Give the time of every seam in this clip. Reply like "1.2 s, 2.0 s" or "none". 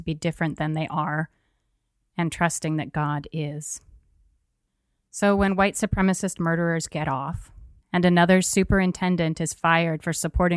7.8 s